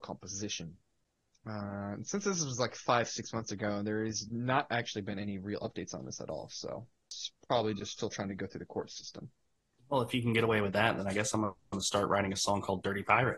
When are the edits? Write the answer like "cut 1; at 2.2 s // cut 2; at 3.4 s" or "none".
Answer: none